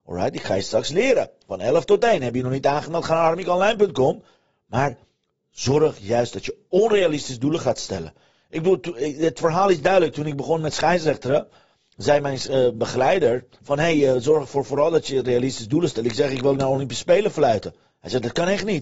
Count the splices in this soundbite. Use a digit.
0